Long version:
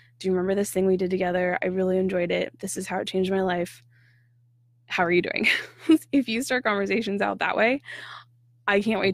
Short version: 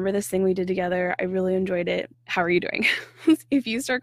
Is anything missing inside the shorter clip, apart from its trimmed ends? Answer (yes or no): yes